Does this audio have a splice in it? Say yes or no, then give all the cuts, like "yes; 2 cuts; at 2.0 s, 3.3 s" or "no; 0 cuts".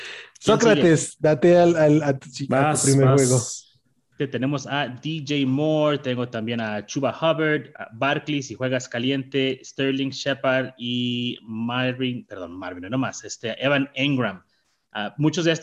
yes; 1 cut; at 4.2 s